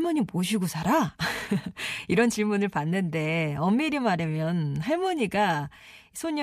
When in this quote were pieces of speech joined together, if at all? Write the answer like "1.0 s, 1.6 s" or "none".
none